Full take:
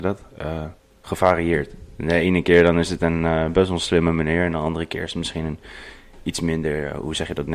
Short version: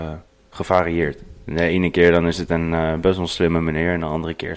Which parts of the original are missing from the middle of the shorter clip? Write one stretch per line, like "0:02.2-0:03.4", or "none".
none

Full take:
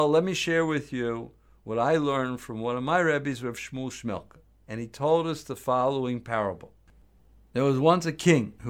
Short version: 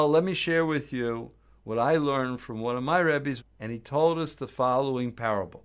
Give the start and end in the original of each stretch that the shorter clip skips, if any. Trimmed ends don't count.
0:03.4-0:04.5

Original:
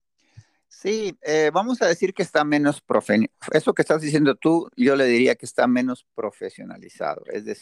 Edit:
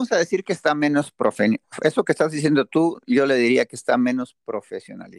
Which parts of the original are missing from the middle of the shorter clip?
none

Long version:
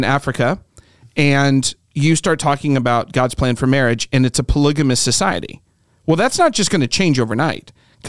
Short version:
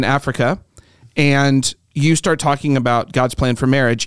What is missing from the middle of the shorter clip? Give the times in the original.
none

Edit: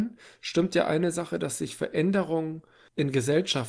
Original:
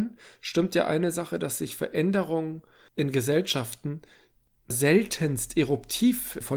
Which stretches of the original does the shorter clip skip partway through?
none

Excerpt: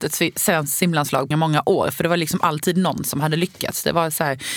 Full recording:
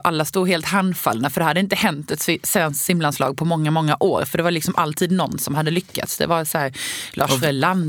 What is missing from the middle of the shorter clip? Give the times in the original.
0:03.4-0:03.6

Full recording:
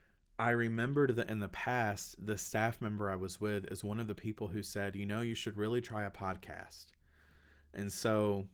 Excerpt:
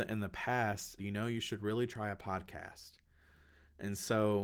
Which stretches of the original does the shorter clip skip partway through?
0:02.2-0:04.9

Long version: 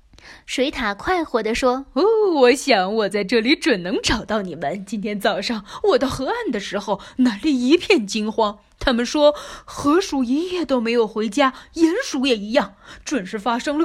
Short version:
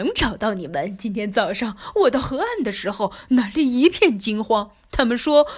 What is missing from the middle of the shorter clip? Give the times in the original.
none

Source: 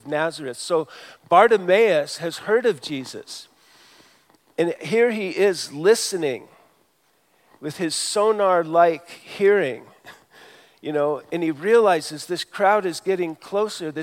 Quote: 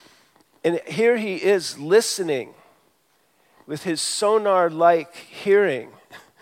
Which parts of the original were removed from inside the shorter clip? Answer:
none

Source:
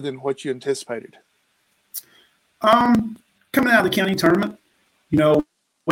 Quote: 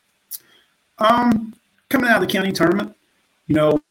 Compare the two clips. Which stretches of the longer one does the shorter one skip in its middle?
none

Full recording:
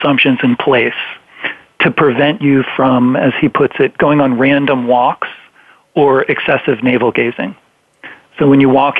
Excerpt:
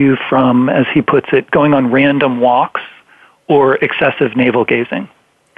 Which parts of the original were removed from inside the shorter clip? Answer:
none

